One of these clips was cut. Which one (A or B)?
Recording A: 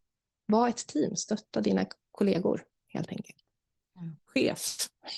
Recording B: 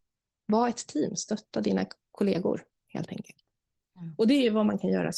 A